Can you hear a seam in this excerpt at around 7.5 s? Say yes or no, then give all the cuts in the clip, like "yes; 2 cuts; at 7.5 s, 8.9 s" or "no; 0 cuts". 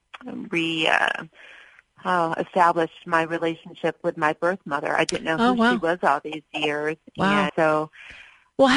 yes; 1 cut; at 7.5 s